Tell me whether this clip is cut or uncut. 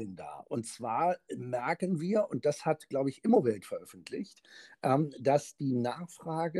uncut